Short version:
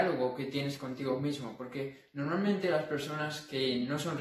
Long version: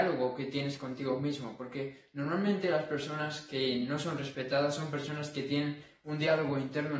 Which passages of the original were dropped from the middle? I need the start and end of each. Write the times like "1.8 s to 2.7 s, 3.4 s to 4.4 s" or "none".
none